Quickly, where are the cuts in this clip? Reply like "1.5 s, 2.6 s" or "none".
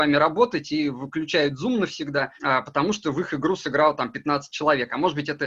2.4 s